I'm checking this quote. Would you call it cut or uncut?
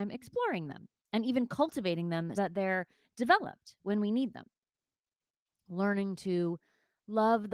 cut